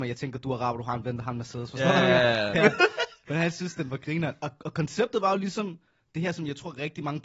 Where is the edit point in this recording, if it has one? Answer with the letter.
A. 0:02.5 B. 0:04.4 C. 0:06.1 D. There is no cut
A